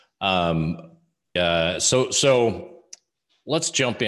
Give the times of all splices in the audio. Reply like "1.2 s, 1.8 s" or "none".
1.4 s